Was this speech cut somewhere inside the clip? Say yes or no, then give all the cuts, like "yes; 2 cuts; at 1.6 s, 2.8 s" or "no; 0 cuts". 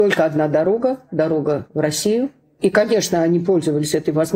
no; 0 cuts